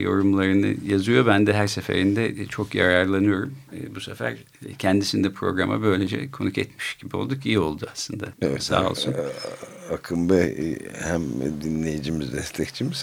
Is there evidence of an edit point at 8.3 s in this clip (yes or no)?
yes